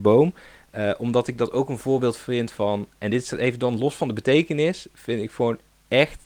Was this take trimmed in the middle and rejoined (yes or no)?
no